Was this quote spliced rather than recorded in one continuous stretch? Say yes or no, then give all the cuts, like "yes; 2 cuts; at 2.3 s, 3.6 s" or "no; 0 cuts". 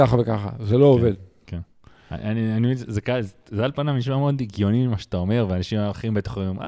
no; 0 cuts